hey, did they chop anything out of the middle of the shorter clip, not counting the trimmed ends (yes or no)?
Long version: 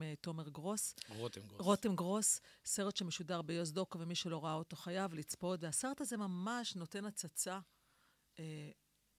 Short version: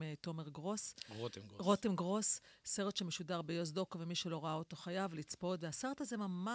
no